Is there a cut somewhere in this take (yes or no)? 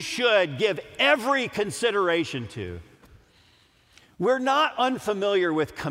no